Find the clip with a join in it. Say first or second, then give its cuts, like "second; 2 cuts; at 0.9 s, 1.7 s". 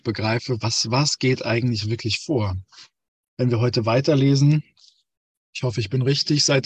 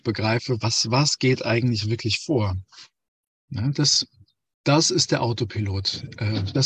second; 1 cut; at 3.3 s